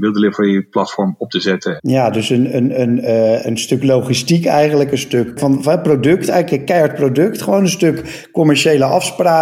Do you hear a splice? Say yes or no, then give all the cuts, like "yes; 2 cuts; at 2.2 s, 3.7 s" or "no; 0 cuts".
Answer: yes; 1 cut; at 1.8 s